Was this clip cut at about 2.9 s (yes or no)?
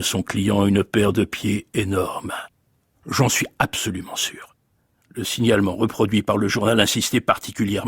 yes